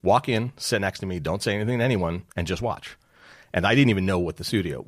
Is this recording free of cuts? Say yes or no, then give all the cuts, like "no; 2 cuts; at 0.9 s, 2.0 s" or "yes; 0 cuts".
no; 1 cut; at 2.3 s